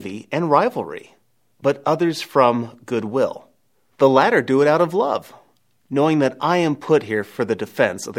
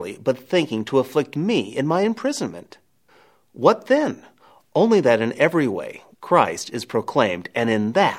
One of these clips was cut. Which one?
second; 1 cut; at 6.1 s

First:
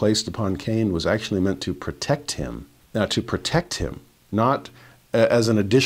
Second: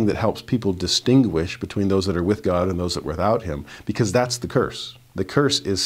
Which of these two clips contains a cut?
first; 1 cut; at 2.8 s

